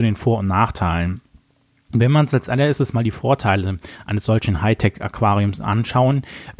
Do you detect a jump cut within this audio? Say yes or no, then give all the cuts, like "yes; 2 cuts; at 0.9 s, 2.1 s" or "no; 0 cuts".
no; 0 cuts